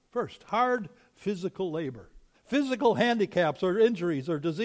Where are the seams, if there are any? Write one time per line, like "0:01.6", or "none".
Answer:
0:02.3